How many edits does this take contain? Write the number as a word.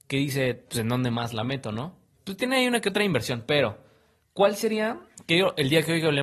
one